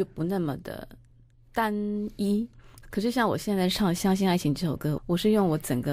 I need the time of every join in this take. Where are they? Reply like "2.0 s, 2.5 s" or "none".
2.8 s, 5.0 s